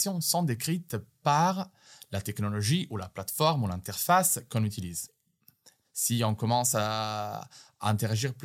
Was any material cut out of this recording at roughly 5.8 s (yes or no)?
yes